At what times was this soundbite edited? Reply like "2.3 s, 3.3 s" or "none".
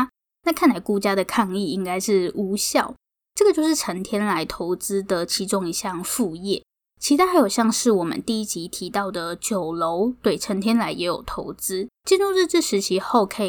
11.9 s